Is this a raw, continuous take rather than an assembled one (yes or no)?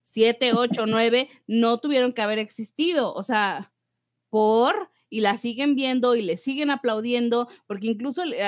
yes